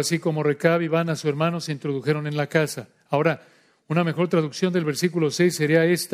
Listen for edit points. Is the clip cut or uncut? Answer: uncut